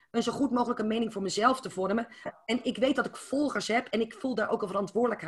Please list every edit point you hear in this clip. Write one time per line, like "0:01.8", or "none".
0:02.3